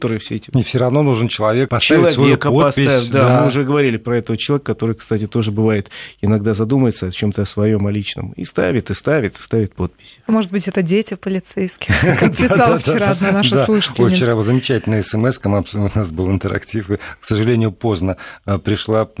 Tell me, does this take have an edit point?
yes; 1 cut; at 1.7 s

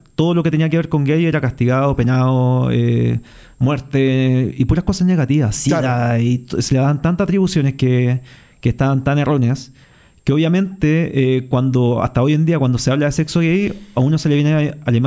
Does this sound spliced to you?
no; 0 cuts

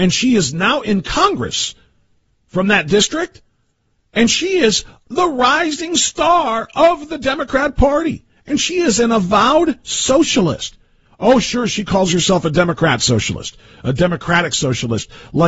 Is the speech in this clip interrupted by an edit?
no; 0 cuts

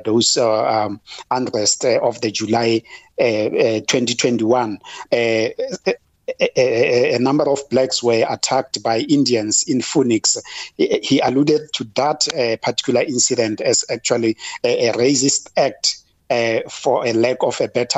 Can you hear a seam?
yes; 1 cut; at 5.1 s

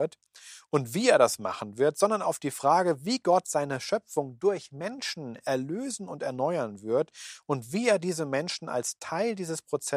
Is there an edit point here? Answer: no; 0 cuts

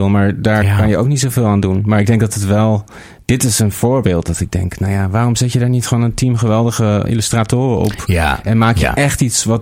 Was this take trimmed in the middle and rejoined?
yes; 1 cut; at 7.1 s

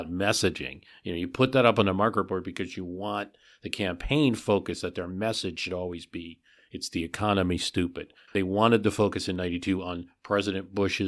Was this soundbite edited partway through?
yes; 1 cut; at 8.3 s

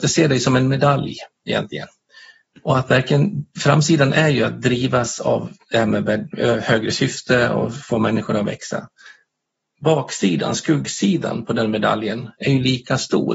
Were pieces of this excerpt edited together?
yes; 1 cut; at 2.5 s

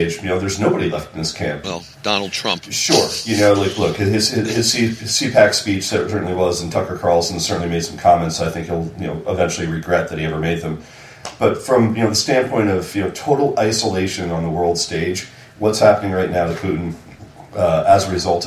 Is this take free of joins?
no; 1 cut; at 1.6 s

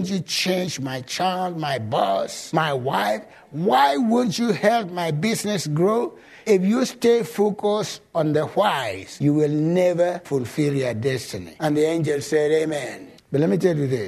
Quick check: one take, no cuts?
yes; 0 cuts

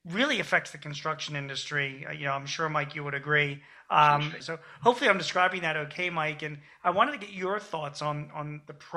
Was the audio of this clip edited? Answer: yes; 1 cut; at 4.4 s

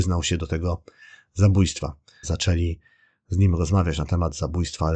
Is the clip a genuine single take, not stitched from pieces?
no; 1 cut; at 2.2 s

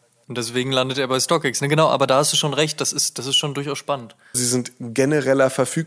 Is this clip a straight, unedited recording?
no; 1 cut; at 4.3 s

